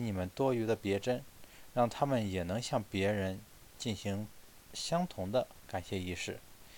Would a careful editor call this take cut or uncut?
uncut